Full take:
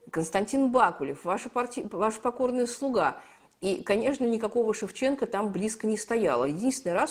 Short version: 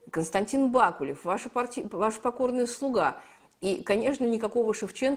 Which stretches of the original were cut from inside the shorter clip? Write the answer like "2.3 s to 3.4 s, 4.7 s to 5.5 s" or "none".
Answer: none